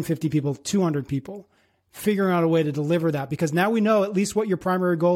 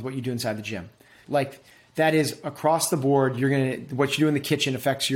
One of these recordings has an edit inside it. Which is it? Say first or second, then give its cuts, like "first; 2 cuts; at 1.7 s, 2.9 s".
second; 1 cut; at 1.2 s